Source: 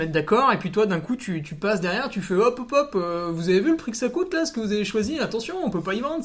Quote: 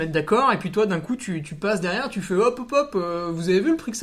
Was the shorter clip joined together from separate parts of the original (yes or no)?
no